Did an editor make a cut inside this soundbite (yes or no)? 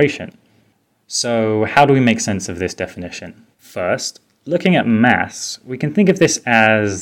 yes